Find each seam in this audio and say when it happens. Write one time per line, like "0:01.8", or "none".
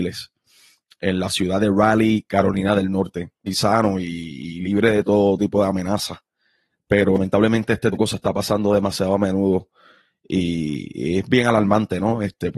0:03.5
0:06.7
0:07.9